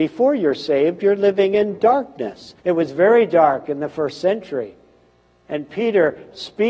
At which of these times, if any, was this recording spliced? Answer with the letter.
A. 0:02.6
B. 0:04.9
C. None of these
A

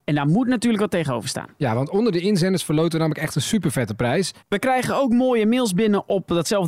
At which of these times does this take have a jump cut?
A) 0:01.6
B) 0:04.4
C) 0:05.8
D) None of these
B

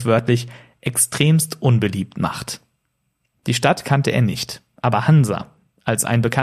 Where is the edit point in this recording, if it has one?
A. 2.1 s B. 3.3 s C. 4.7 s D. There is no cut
B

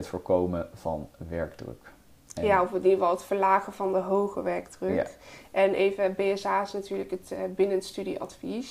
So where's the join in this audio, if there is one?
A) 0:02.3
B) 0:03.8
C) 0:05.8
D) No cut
D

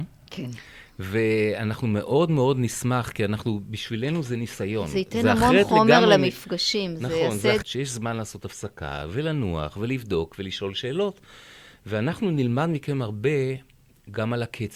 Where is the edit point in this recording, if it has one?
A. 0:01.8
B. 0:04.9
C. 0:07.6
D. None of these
C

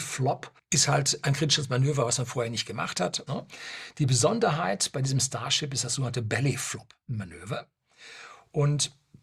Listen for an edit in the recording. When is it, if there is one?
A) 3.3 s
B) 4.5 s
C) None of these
A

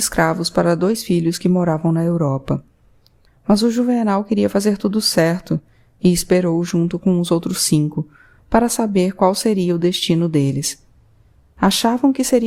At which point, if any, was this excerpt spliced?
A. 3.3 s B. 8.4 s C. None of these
A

